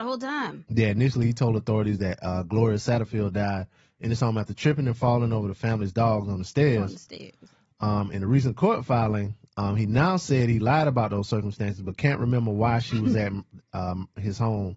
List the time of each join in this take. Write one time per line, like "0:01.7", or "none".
none